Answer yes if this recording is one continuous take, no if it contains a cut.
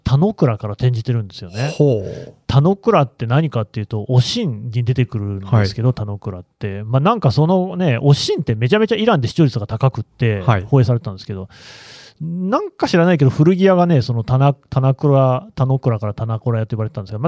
yes